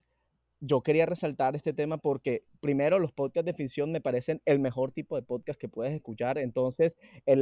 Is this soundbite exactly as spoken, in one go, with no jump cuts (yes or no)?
yes